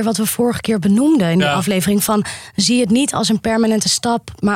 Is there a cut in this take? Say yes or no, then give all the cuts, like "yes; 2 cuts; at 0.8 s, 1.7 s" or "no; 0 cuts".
no; 0 cuts